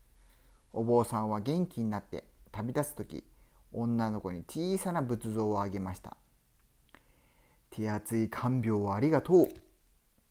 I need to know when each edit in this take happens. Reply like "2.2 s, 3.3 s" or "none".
none